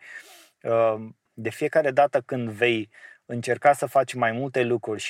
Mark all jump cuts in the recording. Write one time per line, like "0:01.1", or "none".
0:01.3